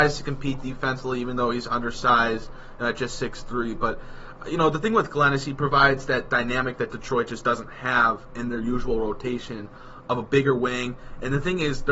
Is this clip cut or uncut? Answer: uncut